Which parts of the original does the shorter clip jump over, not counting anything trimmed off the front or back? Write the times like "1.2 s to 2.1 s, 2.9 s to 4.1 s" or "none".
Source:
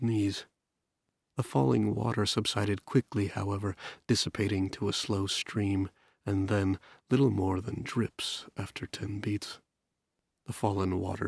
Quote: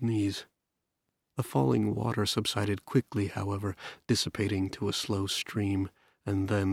none